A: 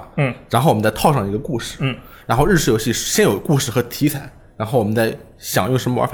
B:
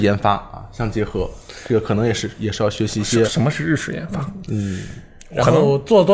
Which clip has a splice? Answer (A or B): B